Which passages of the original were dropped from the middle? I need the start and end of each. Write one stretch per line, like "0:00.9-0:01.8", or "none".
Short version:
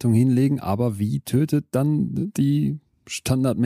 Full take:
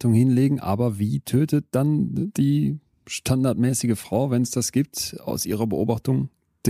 none